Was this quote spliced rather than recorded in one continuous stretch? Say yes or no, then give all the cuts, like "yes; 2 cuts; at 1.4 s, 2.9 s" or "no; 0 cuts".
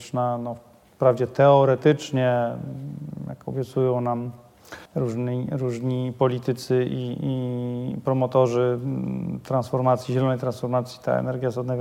yes; 1 cut; at 4.9 s